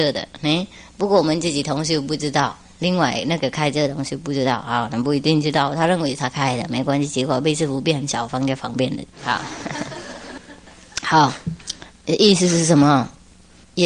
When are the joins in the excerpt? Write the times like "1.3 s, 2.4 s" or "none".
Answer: none